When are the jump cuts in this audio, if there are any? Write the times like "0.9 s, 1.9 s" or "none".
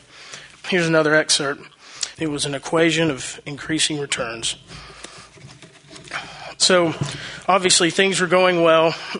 2.1 s

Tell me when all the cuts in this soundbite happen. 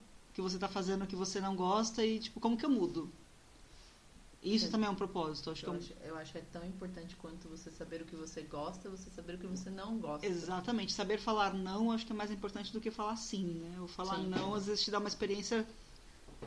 none

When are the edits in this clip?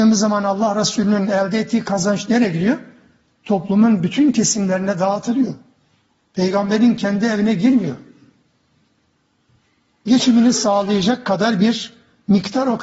none

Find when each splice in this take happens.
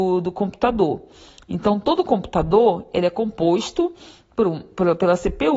none

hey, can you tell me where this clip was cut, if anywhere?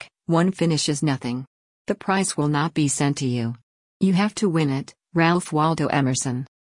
none

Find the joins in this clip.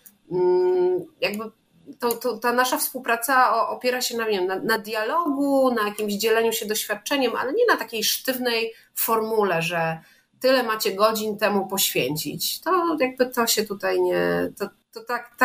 none

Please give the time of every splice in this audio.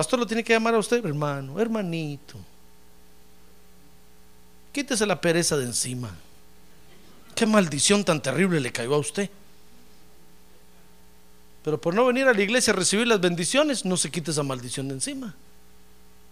1.0 s

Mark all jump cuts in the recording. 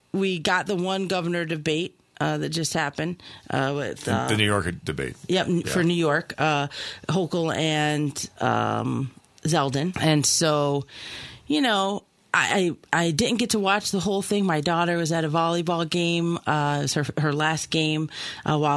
9.9 s

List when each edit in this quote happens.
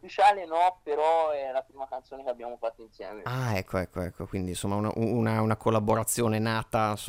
none

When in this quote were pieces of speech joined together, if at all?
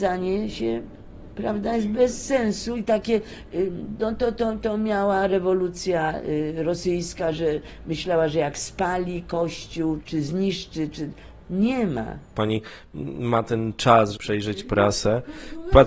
10.0 s, 12.3 s, 14.1 s

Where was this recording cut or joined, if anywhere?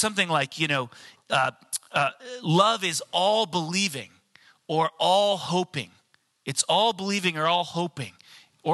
none

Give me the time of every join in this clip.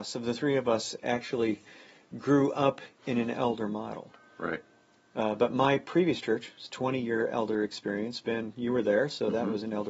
none

